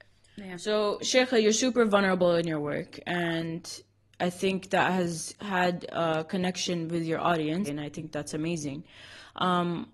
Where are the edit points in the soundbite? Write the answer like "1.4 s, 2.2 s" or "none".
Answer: 7.7 s